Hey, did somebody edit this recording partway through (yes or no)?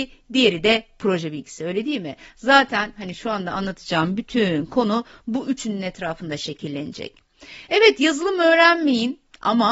no